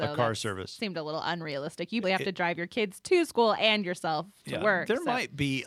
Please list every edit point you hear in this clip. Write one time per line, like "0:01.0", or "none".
0:02.0